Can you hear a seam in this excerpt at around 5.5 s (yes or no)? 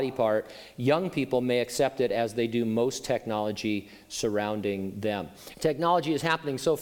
yes